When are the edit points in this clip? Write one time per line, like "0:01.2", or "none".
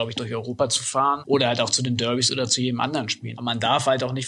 0:01.2
0:03.3